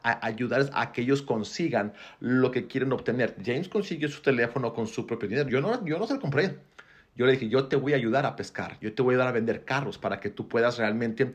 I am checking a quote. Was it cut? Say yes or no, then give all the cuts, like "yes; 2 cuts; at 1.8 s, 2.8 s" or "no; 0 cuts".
no; 0 cuts